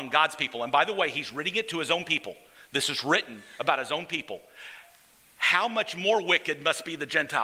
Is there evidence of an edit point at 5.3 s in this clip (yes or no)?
no